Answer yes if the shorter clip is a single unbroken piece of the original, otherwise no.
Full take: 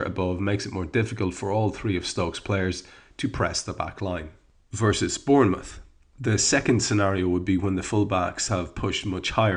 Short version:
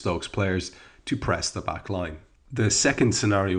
no